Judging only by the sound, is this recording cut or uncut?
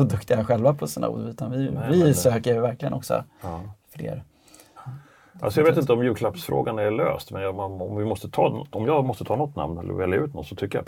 cut